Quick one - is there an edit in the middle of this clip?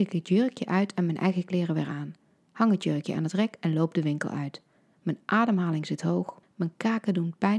yes; 1 cut; at 6.4 s

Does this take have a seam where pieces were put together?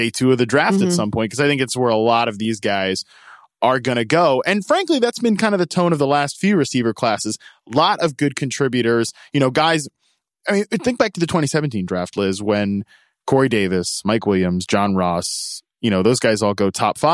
no; 0 cuts

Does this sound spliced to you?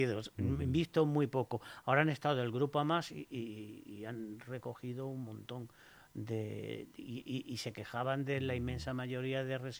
no; 0 cuts

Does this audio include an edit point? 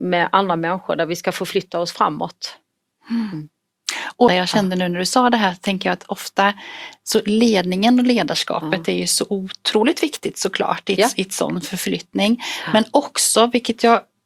yes; 1 cut; at 4.3 s

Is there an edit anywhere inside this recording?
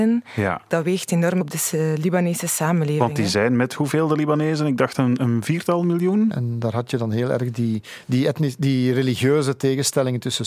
yes; 1 cut; at 6.3 s

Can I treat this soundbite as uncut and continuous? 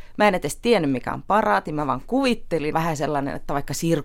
no; 1 cut; at 2.7 s

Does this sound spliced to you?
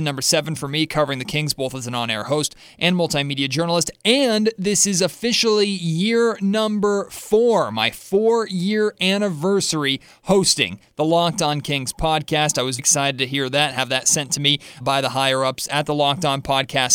yes; 2 cuts; at 12.8 s, 14.8 s

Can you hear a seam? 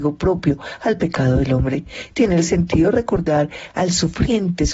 no; 0 cuts

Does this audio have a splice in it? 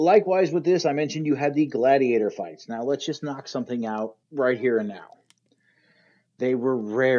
yes; 1 cut; at 4.2 s

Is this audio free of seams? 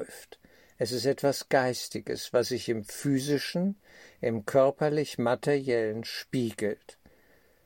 yes; 0 cuts

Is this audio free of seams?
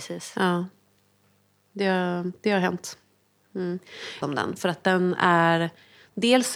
no; 1 cut; at 4.2 s

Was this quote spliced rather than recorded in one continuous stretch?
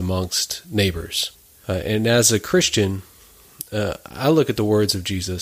no; 0 cuts

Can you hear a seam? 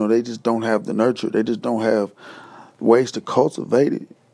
no; 0 cuts

